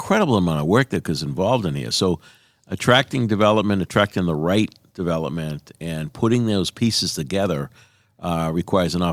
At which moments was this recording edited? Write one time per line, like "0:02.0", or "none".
none